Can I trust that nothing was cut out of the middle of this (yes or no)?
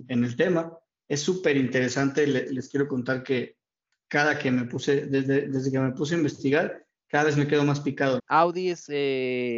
no